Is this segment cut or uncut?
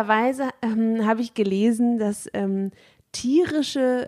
uncut